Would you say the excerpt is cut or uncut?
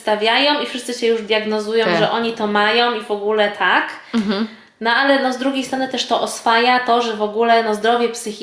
uncut